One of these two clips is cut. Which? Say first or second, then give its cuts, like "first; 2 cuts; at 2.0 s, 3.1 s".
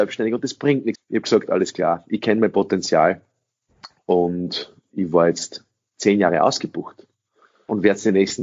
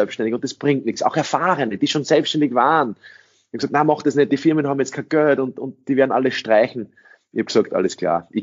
first; 1 cut; at 0.9 s